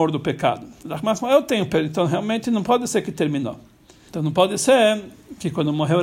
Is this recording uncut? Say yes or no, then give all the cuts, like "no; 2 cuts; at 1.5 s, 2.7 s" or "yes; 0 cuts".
no; 1 cut; at 4.1 s